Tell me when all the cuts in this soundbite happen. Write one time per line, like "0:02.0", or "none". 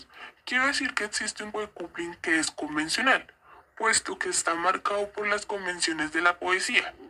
0:01.5